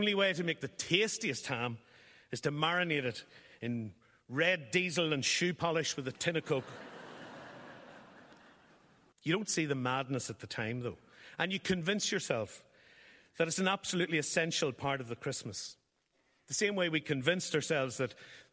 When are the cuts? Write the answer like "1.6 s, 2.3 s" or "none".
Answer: 9.1 s